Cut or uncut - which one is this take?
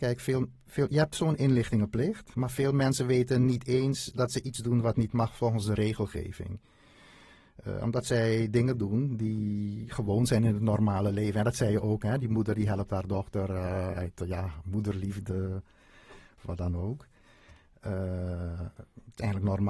uncut